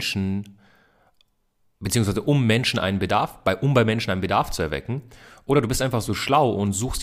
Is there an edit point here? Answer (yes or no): no